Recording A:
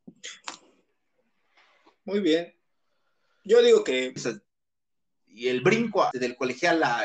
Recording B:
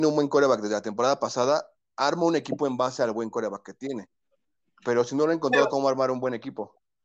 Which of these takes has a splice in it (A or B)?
A